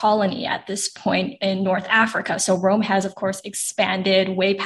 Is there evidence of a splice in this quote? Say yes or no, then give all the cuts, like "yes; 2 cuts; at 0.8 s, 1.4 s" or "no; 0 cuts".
no; 0 cuts